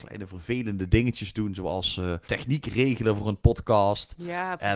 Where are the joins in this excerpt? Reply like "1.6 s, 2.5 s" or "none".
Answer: 2.3 s